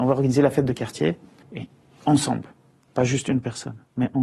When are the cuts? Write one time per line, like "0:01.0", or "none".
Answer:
0:01.4